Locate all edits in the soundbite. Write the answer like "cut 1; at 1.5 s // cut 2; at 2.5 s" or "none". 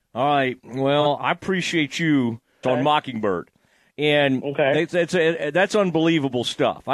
cut 1; at 1.2 s // cut 2; at 2.6 s